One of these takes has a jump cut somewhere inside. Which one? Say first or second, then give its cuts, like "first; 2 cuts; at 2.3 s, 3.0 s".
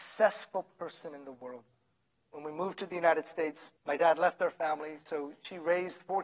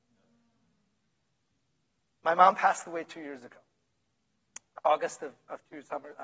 first; 2 cuts; at 2.2 s, 3.8 s